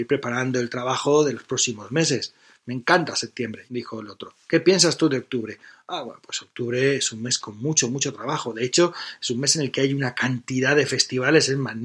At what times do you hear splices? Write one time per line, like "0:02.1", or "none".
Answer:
0:03.7